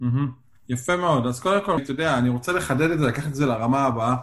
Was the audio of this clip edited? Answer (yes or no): yes